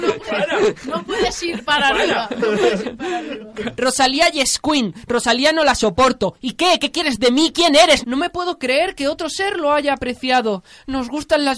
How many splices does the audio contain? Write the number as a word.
two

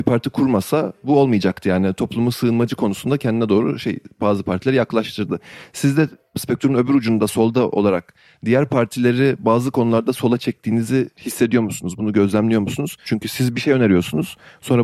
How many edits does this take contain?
two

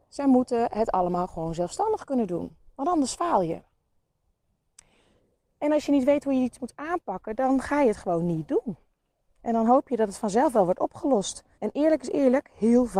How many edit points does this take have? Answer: one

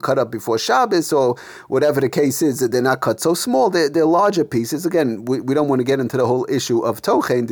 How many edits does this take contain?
zero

